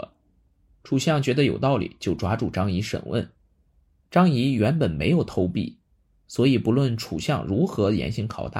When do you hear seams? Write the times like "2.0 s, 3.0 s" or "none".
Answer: none